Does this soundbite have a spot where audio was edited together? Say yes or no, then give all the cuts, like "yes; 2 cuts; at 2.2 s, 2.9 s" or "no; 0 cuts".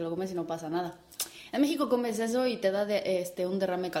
no; 0 cuts